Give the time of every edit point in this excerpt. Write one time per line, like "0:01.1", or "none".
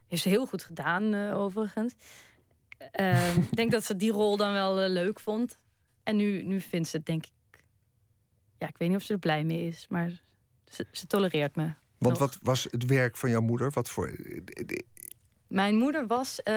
none